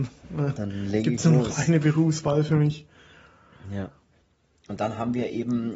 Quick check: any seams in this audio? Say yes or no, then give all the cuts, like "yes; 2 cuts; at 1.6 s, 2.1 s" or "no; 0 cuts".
no; 0 cuts